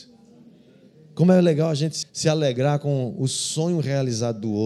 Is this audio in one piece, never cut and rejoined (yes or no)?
no